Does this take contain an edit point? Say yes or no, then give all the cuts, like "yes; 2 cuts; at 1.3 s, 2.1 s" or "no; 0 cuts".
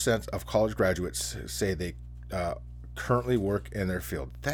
no; 0 cuts